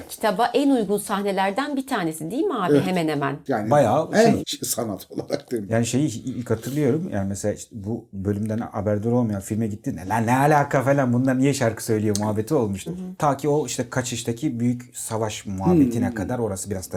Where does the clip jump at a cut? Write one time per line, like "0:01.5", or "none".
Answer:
0:04.4
0:12.9